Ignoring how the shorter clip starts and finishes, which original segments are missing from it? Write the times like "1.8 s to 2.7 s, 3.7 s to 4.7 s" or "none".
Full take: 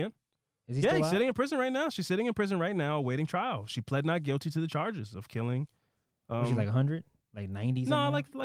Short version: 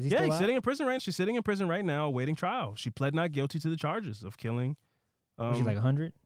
1.7 s to 1.9 s